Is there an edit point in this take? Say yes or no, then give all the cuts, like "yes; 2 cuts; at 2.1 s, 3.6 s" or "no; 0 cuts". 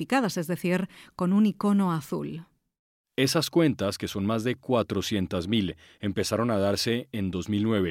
no; 0 cuts